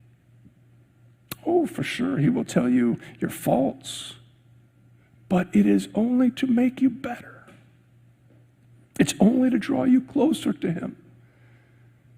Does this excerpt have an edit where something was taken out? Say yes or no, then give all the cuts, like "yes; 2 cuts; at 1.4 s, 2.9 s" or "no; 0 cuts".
no; 0 cuts